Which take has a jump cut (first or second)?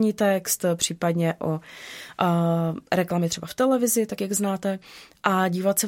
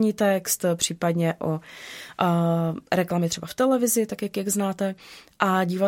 first